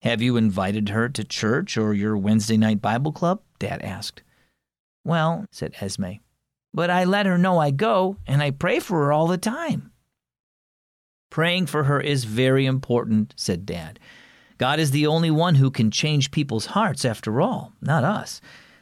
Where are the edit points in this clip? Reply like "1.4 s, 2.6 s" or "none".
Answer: 5.4 s